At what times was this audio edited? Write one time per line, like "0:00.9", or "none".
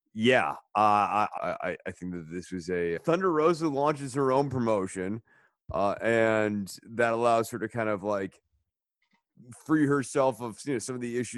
0:01.4
0:03.0